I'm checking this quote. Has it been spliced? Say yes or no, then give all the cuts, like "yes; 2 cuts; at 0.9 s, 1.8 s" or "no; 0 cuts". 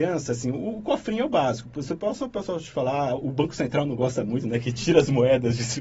no; 0 cuts